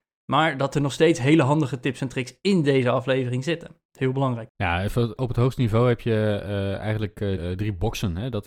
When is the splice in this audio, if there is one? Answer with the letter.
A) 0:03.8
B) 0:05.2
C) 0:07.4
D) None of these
C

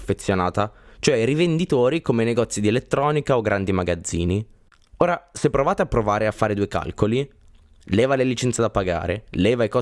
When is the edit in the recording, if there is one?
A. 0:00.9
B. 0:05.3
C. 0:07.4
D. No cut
D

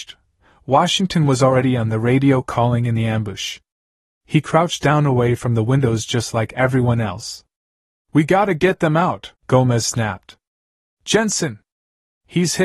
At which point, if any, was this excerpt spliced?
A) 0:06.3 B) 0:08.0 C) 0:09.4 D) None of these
C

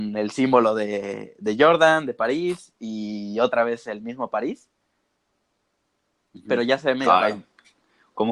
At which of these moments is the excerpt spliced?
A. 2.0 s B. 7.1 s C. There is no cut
C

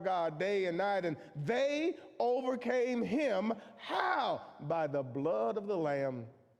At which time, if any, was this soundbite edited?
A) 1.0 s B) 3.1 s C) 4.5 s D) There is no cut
D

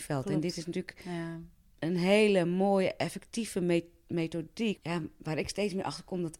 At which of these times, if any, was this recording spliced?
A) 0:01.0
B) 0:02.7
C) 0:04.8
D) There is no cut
C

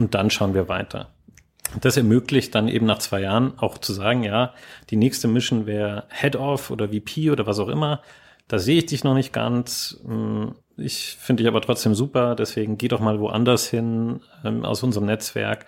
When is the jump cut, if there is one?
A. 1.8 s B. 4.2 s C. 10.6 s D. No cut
D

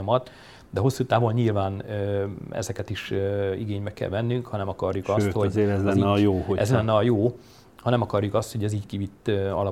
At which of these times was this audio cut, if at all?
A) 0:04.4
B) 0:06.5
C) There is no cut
C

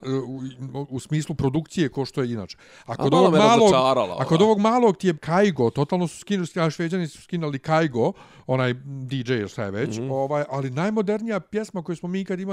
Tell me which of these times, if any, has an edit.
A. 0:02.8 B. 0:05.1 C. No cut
B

